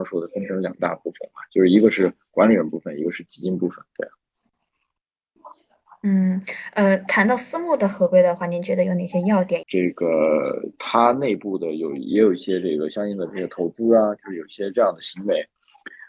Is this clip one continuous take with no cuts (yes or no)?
no